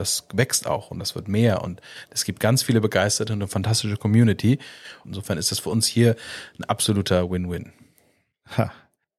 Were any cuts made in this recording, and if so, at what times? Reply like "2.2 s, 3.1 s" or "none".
5.0 s